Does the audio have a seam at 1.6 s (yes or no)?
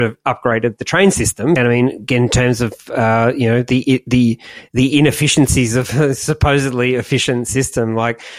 yes